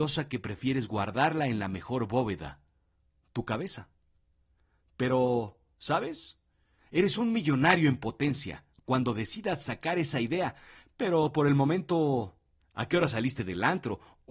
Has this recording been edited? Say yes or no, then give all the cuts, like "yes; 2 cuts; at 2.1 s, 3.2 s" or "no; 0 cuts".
yes; 2 cuts; at 6.8 s, 12.6 s